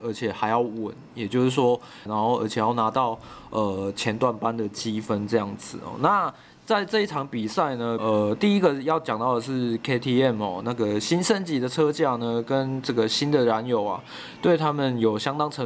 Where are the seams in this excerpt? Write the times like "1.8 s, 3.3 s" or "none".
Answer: 2.1 s, 8.0 s, 10.6 s